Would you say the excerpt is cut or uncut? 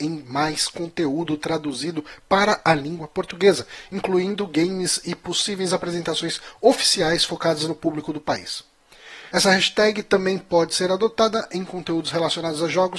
cut